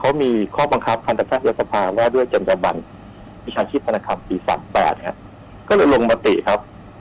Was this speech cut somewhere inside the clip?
no; 0 cuts

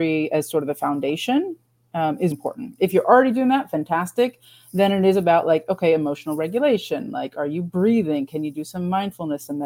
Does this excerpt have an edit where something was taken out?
yes; 1 cut; at 2.3 s

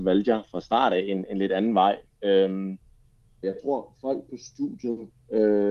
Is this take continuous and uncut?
no; 1 cut; at 3.4 s

